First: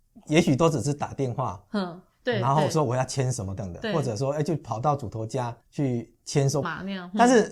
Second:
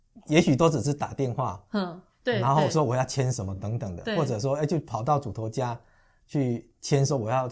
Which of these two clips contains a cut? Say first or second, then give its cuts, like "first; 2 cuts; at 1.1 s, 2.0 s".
first; 3 cuts; at 3.6 s, 5.6 s, 6.6 s